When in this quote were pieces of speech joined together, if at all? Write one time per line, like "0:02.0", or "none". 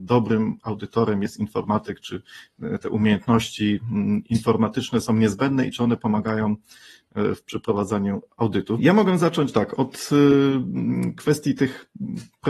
0:08.8

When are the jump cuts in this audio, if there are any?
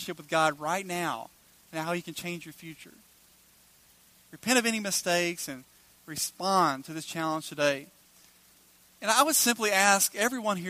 none

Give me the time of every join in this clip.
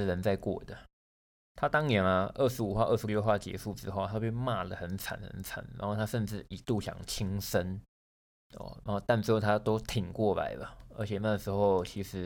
0:01.4

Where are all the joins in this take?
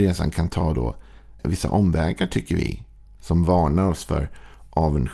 0:01.4
0:03.2

